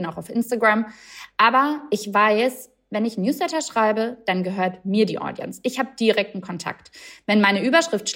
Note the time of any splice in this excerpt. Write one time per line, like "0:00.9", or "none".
none